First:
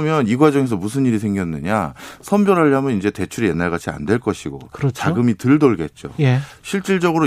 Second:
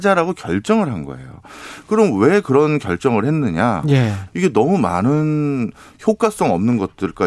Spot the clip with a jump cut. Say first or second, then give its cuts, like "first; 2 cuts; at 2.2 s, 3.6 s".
second; 1 cut; at 4.3 s